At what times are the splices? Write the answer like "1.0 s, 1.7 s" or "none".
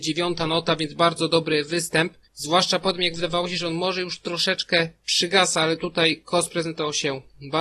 none